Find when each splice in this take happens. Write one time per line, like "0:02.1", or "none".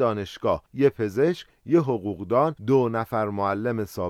0:02.6